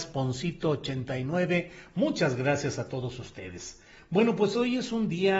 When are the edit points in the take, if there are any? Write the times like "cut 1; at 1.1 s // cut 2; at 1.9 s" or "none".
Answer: none